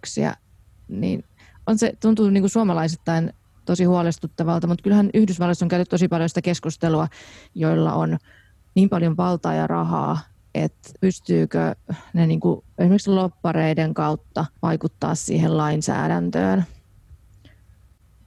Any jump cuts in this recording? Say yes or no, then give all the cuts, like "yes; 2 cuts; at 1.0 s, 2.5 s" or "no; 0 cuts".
yes; 3 cuts; at 7.5 s, 11.0 s, 14.6 s